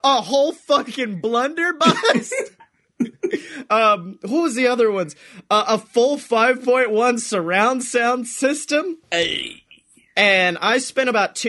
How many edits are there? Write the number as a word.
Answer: zero